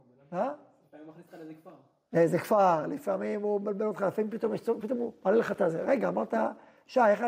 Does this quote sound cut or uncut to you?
uncut